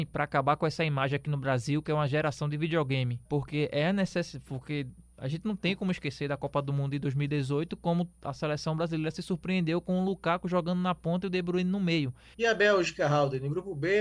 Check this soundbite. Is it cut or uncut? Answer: cut